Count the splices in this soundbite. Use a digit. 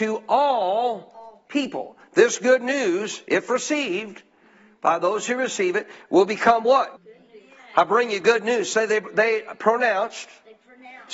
1